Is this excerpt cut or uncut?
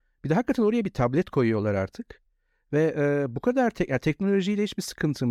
uncut